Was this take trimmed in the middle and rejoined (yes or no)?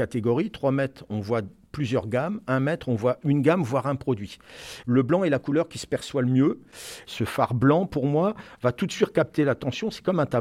no